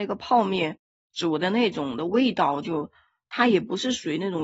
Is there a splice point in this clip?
no; 0 cuts

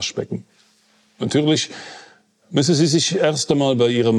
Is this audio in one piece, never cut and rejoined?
yes; 0 cuts

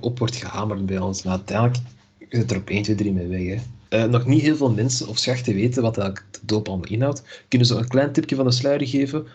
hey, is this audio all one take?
no; 1 cut; at 1.2 s

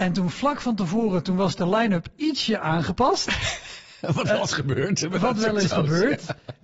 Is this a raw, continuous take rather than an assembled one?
yes; 0 cuts

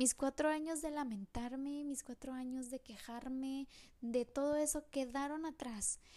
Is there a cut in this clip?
no; 0 cuts

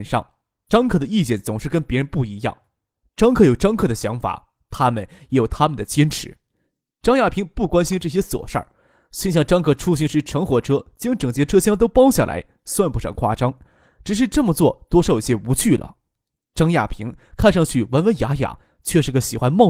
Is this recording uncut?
yes; 0 cuts

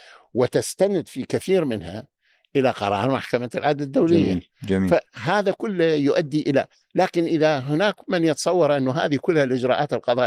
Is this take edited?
no; 0 cuts

